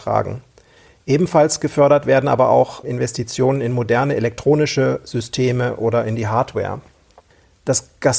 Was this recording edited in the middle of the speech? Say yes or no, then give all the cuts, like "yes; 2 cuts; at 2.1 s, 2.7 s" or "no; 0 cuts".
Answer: yes; 1 cut; at 2.8 s